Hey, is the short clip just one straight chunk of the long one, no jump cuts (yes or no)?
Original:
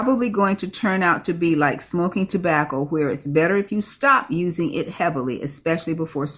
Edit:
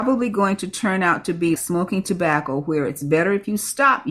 no